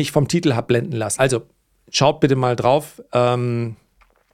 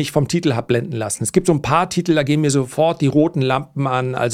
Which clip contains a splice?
first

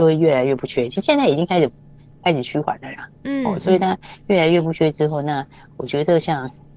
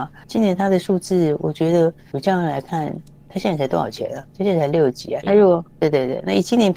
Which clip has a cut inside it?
second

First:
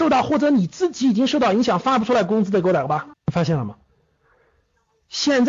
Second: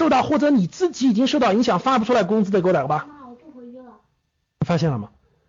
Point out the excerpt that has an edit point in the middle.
first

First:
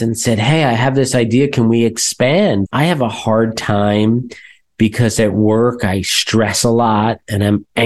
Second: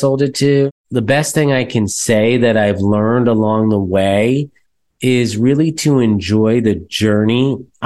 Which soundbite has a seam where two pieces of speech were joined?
first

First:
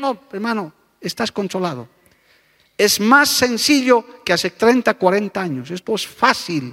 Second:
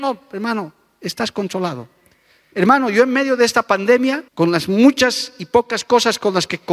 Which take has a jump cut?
second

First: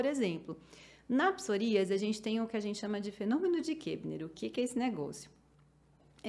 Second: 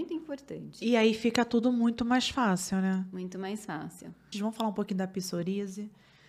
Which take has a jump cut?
second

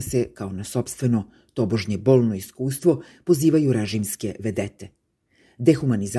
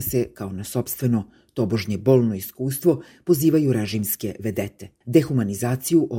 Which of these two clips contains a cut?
second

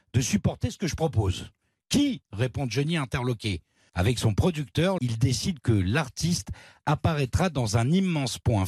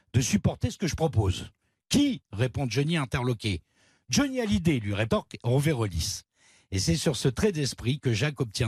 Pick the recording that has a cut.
first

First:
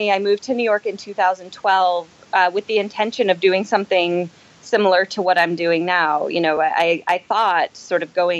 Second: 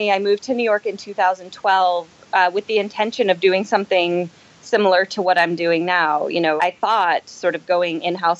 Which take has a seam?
second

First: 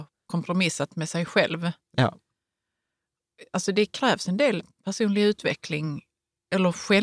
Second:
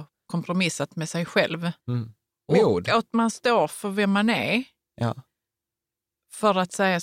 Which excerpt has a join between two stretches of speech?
second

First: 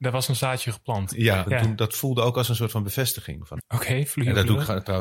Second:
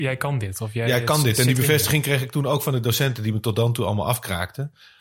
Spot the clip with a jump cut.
first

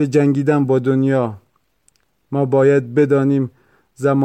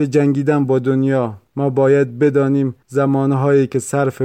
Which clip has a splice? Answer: second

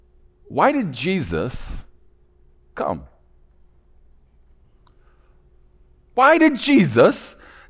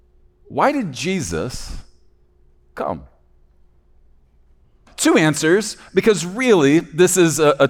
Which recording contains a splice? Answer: second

